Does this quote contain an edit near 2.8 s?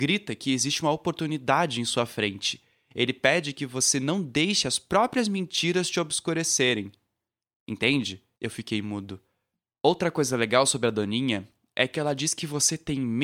no; 1 cut; at 8.3 s

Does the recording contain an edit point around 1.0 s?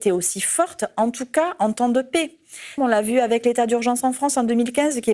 no; 1 cut; at 2.8 s

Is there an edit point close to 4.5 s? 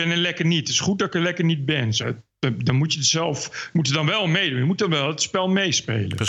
no; 1 cut; at 2.0 s

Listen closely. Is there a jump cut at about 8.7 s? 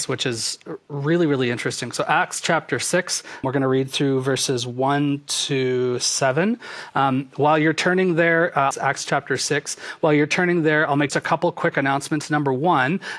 yes; 3 cuts; at 3.4 s, 8.7 s, 11.1 s

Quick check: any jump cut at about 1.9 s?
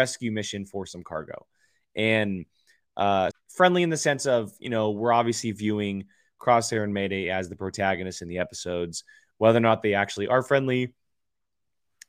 no; 1 cut; at 3.3 s

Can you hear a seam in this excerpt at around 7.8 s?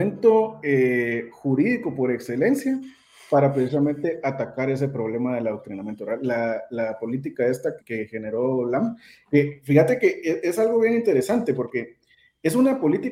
yes; 1 cut; at 7.8 s

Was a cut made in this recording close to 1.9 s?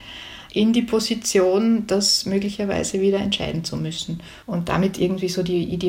no; 1 cut; at 4.4 s

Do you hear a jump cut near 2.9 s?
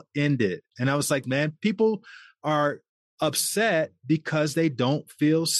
no; 1 cut; at 1.2 s

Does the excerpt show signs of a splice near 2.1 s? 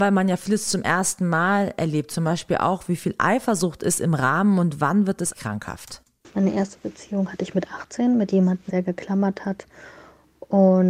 no; 2 cuts; at 5.3 s, 8.7 s

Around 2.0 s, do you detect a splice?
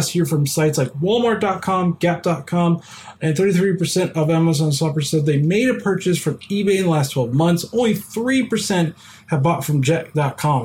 no; 0 cuts

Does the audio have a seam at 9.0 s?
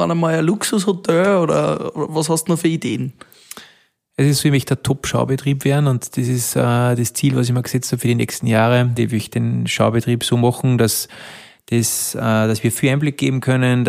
yes; 1 cut; at 9.0 s

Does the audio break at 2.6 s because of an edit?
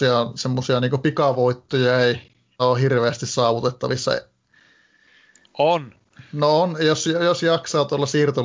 yes; 1 cut; at 2.6 s

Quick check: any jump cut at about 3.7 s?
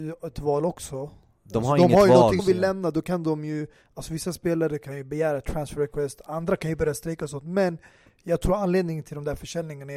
no; 1 cut; at 2.4 s

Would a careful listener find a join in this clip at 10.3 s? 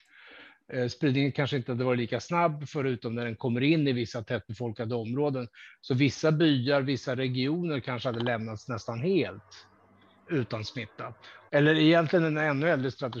yes; 2 cuts; at 10.3 s, 11.5 s

